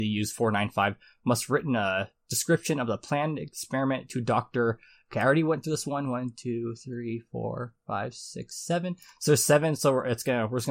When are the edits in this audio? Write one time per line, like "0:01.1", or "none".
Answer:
none